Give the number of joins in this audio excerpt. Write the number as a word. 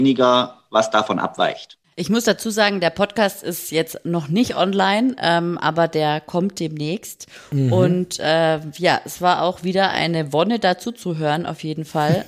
zero